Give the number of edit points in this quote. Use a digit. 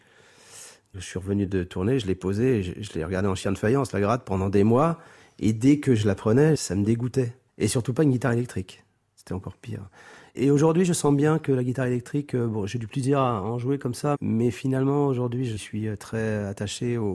2